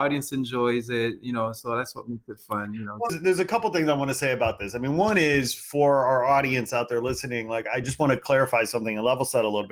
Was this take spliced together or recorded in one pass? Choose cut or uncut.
cut